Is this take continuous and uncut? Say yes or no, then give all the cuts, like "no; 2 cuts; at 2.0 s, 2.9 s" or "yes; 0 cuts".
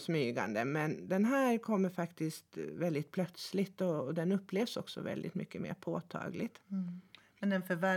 yes; 0 cuts